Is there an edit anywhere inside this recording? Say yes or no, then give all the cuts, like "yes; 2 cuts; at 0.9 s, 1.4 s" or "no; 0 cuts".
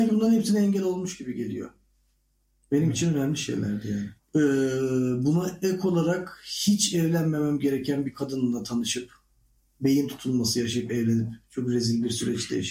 yes; 1 cut; at 4.2 s